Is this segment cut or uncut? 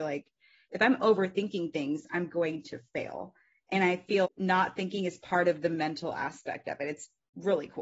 cut